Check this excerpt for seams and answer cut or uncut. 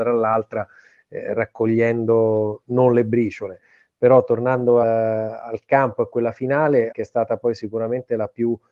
cut